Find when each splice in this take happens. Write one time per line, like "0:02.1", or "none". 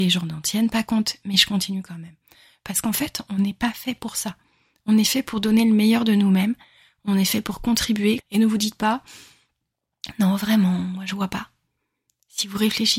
0:08.2